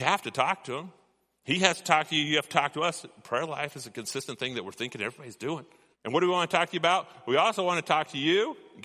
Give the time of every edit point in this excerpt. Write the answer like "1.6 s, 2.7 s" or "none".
5.9 s

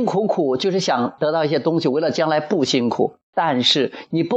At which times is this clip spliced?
none

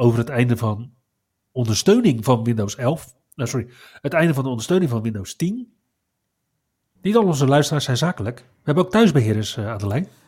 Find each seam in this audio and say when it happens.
7.0 s

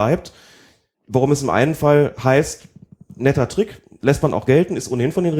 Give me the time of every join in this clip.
0.9 s

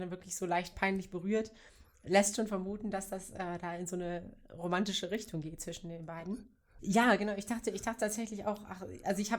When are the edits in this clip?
6.8 s

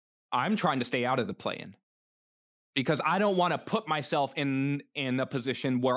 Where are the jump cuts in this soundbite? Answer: none

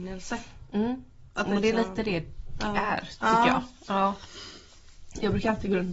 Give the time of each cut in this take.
none

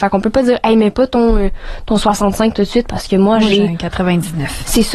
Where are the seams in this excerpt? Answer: none

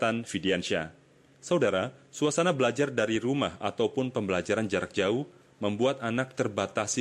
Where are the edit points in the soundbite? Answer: none

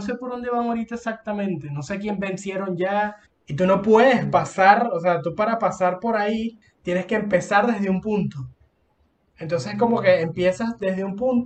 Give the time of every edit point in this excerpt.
3.3 s, 6.6 s

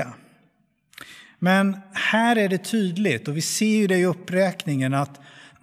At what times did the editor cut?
none

